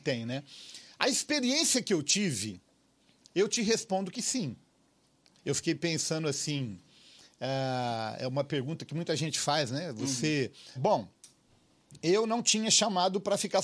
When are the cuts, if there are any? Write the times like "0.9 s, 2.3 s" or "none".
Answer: 5.4 s, 10.8 s